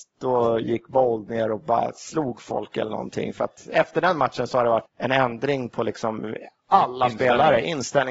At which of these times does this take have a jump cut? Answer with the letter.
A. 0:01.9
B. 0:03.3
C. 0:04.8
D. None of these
C